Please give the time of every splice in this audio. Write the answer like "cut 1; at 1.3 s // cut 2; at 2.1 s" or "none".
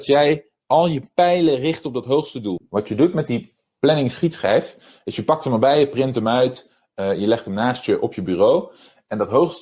cut 1; at 2.6 s